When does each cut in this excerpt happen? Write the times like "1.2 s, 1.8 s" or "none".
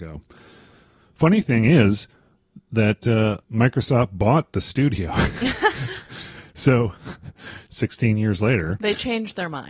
3.4 s